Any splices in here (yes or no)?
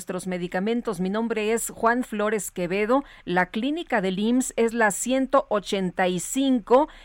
no